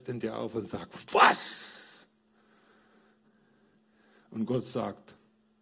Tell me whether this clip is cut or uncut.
uncut